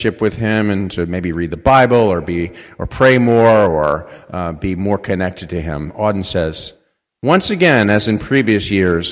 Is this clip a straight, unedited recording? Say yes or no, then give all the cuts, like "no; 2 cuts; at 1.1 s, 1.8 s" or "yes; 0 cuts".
yes; 0 cuts